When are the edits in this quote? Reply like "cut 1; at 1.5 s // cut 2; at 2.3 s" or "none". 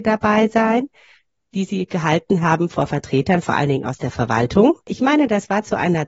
cut 1; at 4.8 s